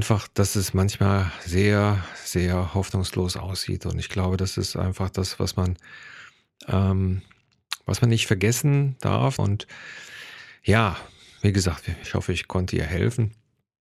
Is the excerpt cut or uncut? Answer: cut